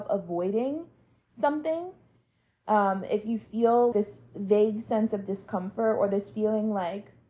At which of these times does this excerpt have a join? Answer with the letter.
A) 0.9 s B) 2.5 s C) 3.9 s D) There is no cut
C